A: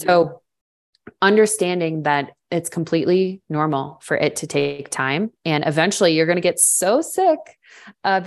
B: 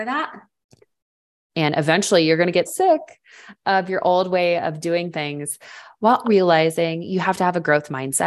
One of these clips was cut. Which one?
B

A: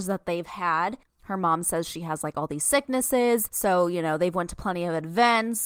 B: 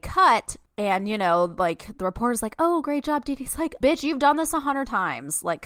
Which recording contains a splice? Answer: B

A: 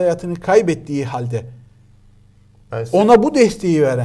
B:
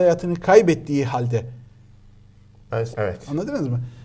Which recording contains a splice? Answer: B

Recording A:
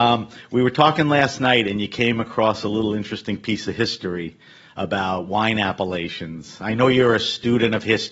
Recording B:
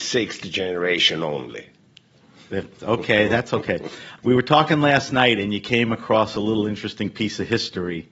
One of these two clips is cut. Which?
B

